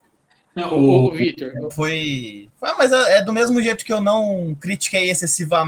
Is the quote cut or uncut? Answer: cut